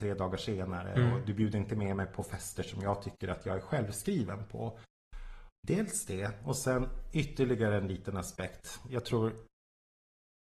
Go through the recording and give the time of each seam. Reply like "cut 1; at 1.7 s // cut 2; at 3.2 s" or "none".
cut 1; at 5.6 s